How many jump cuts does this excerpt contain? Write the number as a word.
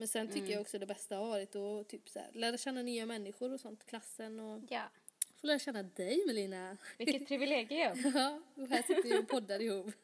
one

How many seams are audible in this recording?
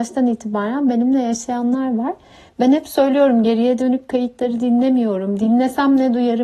zero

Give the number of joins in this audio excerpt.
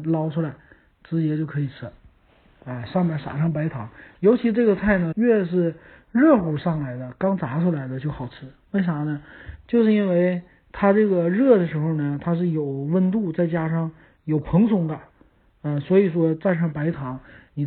one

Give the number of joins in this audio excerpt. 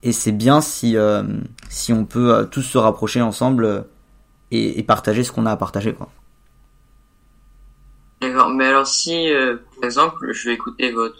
one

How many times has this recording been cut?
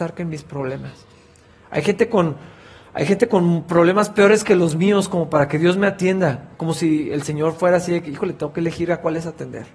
zero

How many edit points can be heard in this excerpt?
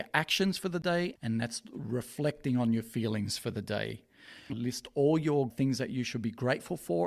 two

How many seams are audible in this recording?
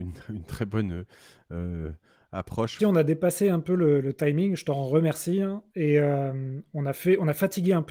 one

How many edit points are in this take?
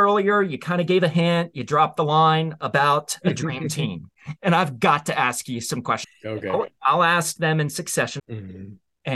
three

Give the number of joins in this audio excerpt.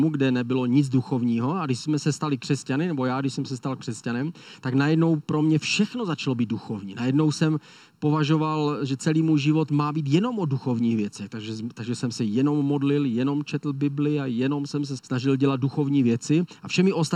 one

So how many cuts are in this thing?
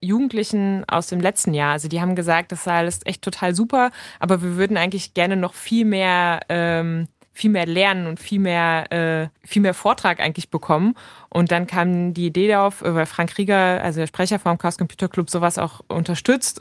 one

